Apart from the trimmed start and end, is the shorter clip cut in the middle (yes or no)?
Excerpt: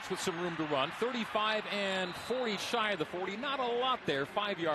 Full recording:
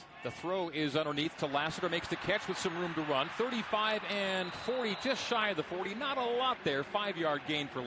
yes